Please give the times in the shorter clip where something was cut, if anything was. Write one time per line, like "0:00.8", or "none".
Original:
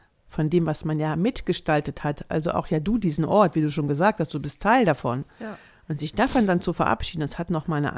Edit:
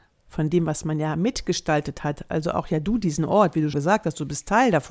0:03.7